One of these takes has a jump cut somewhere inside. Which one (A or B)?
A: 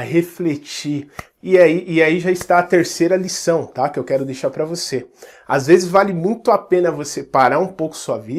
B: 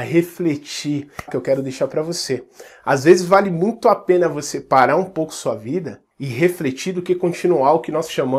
B